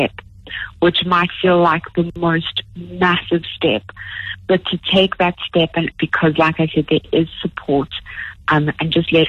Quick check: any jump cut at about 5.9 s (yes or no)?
yes